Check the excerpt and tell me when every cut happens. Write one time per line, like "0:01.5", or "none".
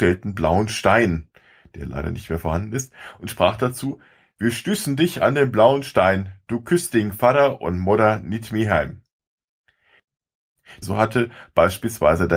0:10.8